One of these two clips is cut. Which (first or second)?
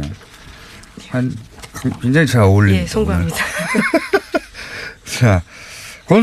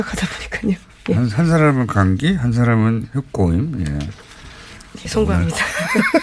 second